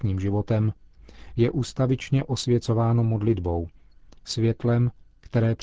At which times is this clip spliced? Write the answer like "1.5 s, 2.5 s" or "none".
none